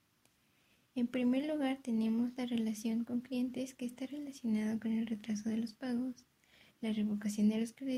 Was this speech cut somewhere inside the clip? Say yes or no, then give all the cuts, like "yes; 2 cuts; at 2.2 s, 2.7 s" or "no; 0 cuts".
no; 0 cuts